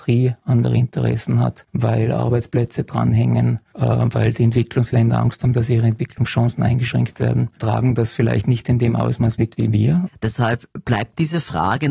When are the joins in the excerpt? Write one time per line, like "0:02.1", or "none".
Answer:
0:10.1

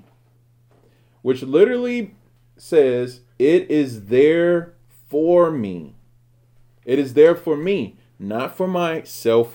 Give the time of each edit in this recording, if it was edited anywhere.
none

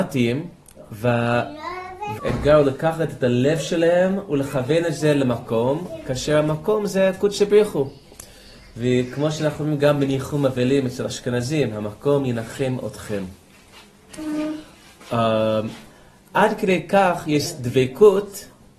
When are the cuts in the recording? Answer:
0:02.2
0:16.2

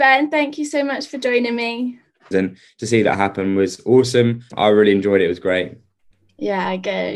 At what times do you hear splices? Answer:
0:02.3
0:04.5

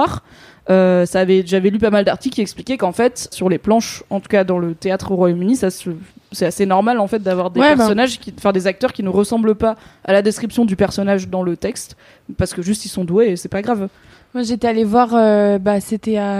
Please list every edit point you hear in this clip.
0:03.3

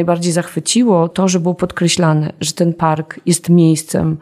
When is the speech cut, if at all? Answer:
0:01.1

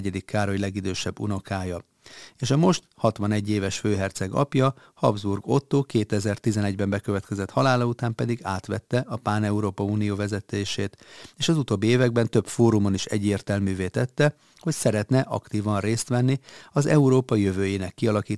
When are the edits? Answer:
none

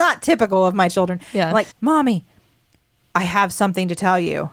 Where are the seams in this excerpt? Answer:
0:01.7

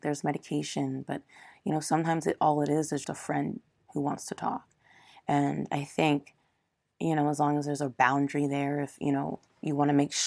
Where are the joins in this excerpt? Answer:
0:03.0

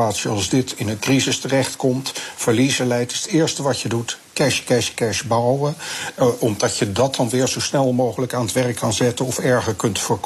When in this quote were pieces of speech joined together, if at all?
none

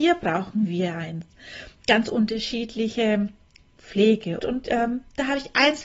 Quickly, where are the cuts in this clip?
0:04.4

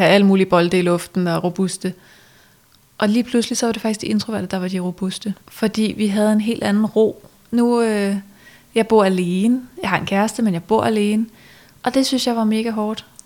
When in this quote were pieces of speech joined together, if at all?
0:05.4
0:07.5

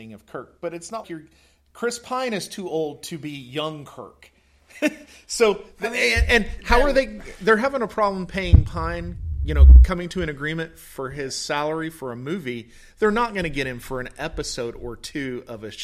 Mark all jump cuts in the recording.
0:01.0

